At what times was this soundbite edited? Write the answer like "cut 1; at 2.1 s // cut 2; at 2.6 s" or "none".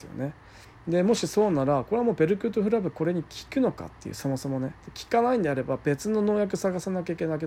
cut 1; at 4.8 s